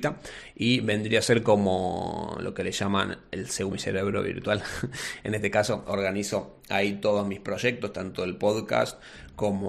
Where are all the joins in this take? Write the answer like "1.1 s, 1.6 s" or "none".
3.7 s